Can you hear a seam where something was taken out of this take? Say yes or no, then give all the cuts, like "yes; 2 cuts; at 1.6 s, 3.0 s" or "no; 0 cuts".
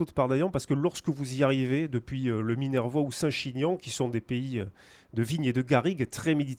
no; 0 cuts